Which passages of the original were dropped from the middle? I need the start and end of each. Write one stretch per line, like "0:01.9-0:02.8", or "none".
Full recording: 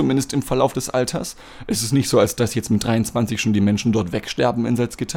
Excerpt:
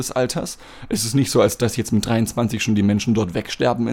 none